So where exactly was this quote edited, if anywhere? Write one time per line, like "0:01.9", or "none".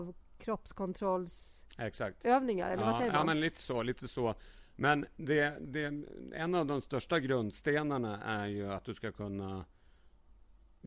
none